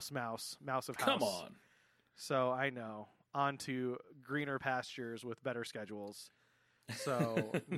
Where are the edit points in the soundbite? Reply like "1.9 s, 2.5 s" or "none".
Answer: none